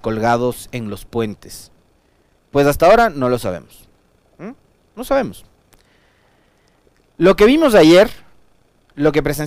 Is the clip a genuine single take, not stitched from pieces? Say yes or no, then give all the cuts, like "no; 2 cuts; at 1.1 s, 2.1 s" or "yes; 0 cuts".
no; 1 cut; at 2.4 s